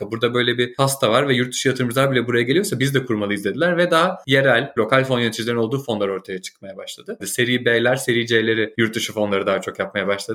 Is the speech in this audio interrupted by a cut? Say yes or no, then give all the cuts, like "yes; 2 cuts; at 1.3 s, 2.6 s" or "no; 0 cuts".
yes; 2 cuts; at 4.8 s, 7.2 s